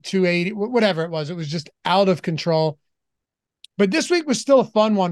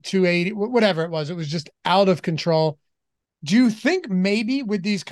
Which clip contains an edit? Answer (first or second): second